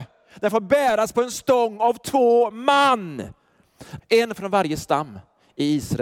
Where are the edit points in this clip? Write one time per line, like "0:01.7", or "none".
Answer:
0:04.0